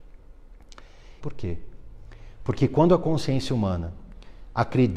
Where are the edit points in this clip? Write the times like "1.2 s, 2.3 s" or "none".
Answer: 1.2 s